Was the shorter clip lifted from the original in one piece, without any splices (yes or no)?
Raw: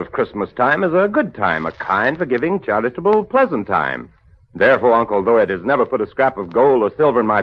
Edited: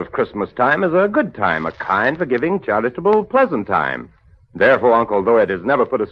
yes